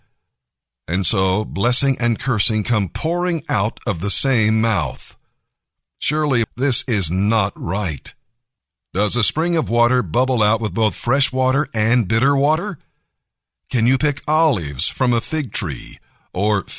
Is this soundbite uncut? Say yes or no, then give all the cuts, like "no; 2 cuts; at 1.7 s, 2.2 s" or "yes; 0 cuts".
no; 1 cut; at 6.4 s